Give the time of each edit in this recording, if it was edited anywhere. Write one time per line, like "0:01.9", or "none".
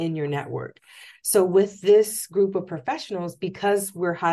none